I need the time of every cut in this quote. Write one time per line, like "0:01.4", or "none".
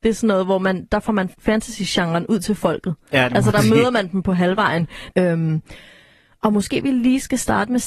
0:05.1